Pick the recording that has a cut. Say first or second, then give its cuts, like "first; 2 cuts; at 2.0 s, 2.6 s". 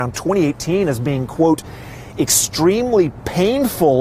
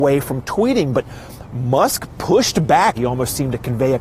second; 1 cut; at 2.9 s